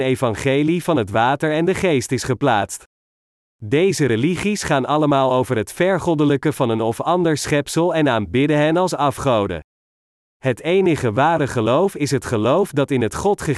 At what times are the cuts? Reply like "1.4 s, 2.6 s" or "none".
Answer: 3.4 s